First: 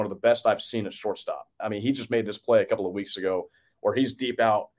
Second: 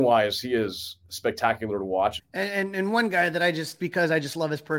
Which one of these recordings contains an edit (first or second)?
second